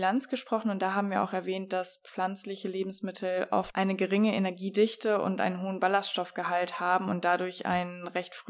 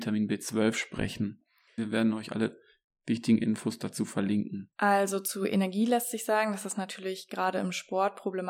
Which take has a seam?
second; 2 cuts; at 1.8 s, 4.7 s

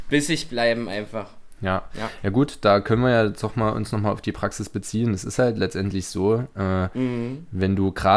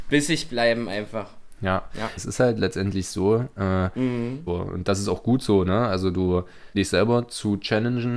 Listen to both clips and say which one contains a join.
second; 3 cuts; at 2.2 s, 4.5 s, 6.7 s

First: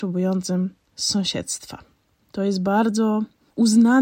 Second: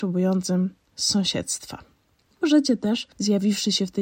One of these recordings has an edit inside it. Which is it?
first; 1 cut; at 2.2 s

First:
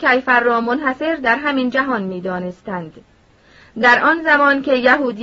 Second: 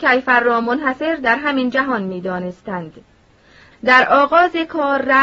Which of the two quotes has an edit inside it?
second; 1 cut; at 3.7 s

